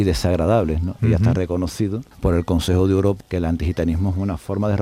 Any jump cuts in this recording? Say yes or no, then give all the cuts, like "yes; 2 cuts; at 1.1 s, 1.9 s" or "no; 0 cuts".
yes; 3 cuts; at 1.0 s, 2.1 s, 3.2 s